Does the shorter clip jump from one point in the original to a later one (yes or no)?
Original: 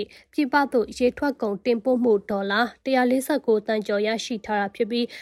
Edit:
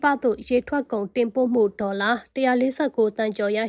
no